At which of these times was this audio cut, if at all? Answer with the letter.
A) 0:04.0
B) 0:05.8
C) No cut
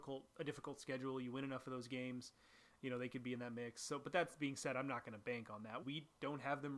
B